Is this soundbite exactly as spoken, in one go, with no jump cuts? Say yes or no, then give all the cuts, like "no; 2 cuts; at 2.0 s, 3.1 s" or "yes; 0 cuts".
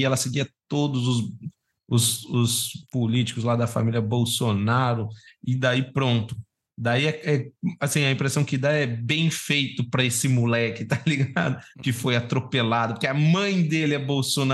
yes; 0 cuts